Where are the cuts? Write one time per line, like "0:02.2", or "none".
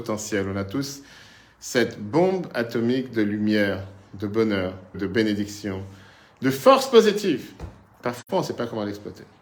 0:04.9